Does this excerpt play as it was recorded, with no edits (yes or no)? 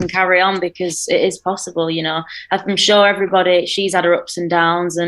yes